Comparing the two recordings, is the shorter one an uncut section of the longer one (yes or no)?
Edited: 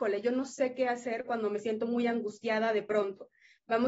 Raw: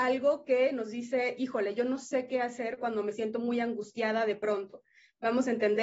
yes